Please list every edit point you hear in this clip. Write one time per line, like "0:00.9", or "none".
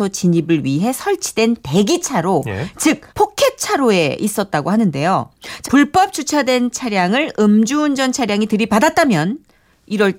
0:03.1
0:05.6